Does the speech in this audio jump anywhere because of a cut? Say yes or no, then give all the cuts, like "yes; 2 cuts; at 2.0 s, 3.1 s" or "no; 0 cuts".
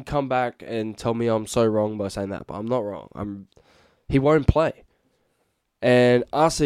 no; 0 cuts